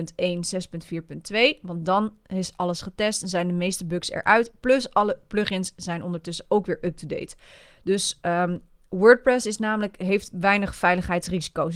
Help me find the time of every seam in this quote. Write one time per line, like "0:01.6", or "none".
none